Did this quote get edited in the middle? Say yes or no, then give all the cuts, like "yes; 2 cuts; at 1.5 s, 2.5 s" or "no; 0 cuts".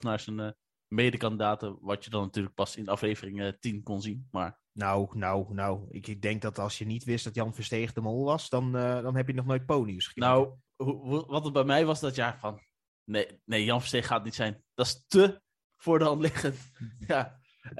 yes; 1 cut; at 10.7 s